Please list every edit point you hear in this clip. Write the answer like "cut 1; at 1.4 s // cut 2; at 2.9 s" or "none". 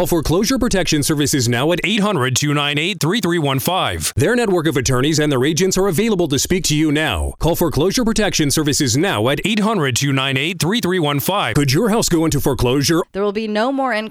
cut 1; at 11.5 s // cut 2; at 13.0 s